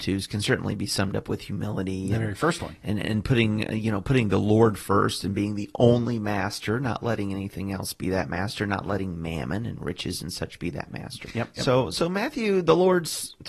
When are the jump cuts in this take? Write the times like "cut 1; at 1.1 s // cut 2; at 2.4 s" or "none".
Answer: cut 1; at 3.0 s // cut 2; at 11.2 s